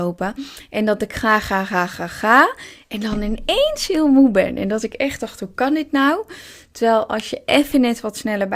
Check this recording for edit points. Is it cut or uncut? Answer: uncut